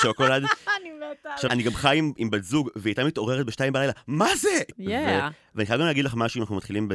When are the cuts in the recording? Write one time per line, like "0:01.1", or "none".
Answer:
0:01.5
0:04.7